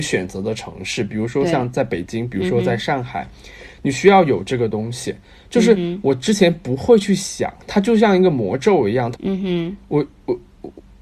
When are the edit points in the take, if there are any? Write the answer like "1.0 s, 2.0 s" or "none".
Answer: 9.1 s